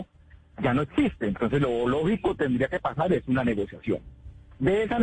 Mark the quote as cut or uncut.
uncut